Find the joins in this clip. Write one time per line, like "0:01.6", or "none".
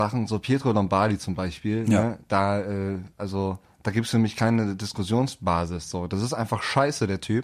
none